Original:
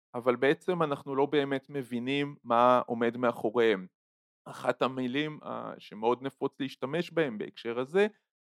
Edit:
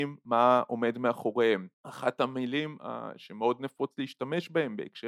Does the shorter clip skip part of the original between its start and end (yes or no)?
yes